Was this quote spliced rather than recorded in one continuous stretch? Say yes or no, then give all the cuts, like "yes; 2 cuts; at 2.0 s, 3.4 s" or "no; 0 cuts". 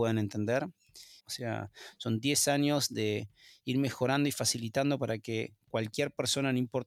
yes; 1 cut; at 1.2 s